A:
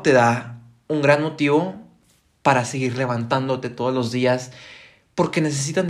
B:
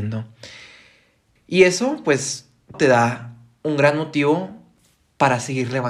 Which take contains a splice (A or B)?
B